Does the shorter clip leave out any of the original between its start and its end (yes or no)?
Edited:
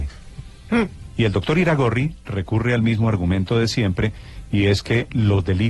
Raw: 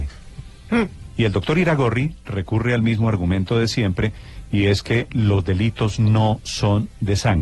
no